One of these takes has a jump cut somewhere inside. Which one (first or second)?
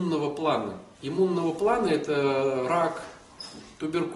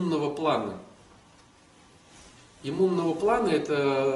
first